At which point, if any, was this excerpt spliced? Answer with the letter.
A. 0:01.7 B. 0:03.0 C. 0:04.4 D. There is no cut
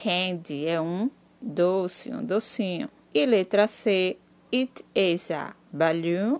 B